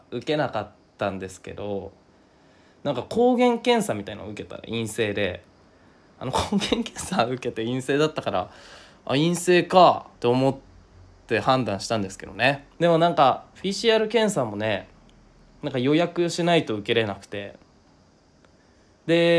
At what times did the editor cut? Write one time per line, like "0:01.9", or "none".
0:10.1
0:12.7